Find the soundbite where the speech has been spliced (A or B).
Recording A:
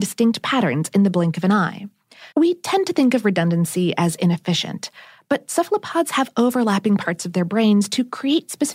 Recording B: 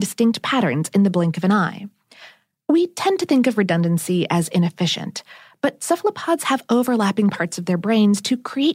A